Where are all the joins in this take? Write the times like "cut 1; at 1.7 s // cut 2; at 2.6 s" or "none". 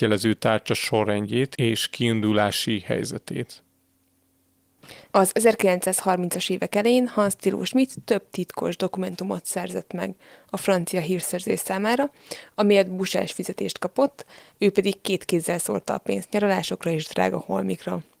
cut 1; at 5.1 s